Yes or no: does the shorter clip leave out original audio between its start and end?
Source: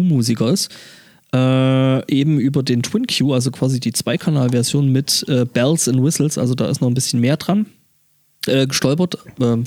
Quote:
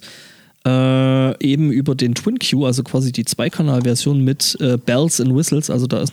no